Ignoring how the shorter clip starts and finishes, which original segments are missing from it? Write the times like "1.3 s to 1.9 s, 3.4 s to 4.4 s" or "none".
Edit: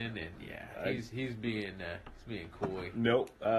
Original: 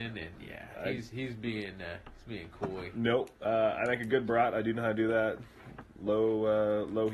none